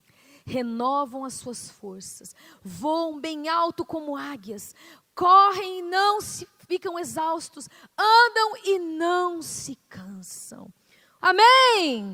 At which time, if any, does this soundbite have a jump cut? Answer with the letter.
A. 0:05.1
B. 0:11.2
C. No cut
B